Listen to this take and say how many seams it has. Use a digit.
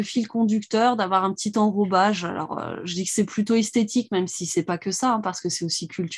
0